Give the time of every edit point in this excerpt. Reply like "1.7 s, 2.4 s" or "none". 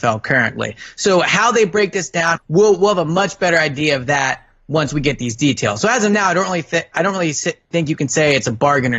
2.4 s